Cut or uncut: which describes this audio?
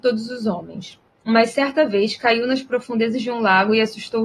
uncut